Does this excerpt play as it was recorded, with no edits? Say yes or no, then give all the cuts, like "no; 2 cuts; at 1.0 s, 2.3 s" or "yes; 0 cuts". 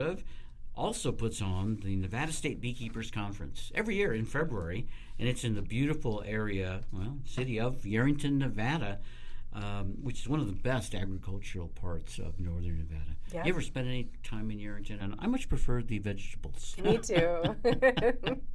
no; 2 cuts; at 15.0 s, 16.8 s